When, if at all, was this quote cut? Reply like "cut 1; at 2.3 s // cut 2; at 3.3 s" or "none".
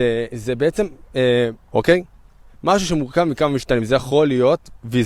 cut 1; at 1.7 s